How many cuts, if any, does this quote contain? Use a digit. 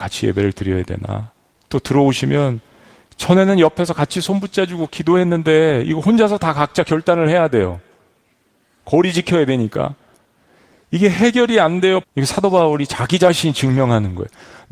1